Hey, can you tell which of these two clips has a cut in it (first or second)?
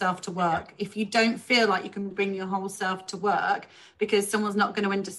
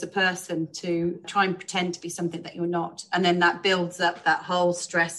second